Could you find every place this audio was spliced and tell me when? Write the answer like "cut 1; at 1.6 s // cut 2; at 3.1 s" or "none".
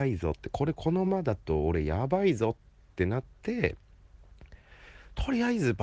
cut 1; at 1.0 s